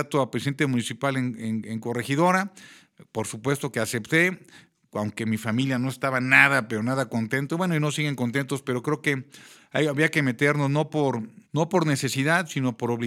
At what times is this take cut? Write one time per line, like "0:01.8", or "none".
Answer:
0:11.4